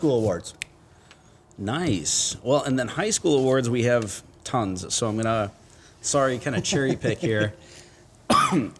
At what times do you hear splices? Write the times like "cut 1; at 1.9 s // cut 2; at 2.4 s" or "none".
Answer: none